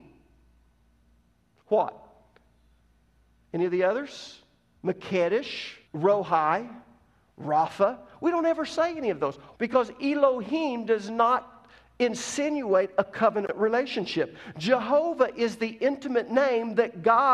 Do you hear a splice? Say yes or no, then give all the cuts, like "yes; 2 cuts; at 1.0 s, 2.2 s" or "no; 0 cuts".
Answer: yes; 2 cuts; at 5.8 s, 9.5 s